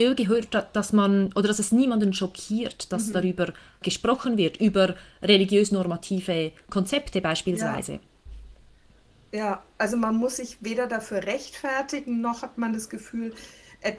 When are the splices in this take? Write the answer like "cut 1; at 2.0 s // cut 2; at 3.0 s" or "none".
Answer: cut 1; at 3.8 s